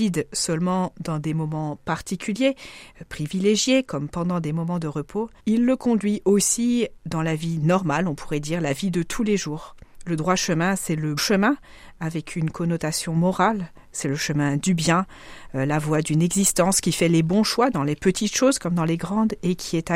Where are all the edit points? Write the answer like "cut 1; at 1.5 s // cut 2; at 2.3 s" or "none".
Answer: cut 1; at 5.4 s // cut 2; at 11.2 s